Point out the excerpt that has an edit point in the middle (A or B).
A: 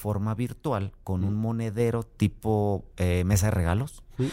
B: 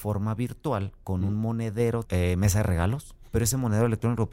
B